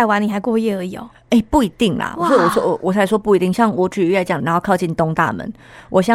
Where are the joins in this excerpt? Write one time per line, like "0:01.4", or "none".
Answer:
0:04.4